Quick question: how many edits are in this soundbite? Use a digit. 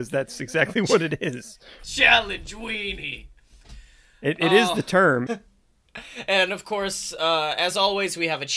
1